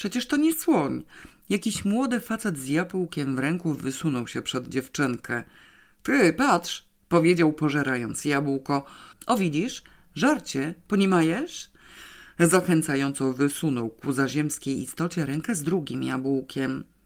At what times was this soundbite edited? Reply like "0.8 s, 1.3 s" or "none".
9.1 s